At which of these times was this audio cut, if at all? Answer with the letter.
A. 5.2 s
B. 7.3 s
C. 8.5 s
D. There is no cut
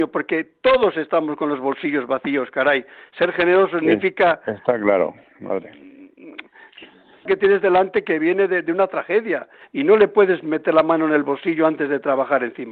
B